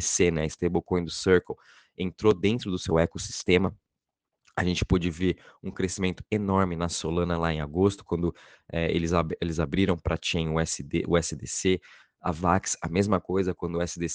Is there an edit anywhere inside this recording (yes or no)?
no